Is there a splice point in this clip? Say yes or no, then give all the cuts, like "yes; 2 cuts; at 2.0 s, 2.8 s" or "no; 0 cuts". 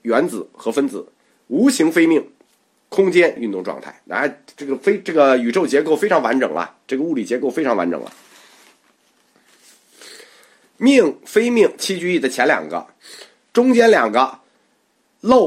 yes; 1 cut; at 3.4 s